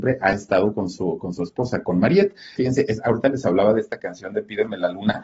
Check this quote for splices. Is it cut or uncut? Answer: cut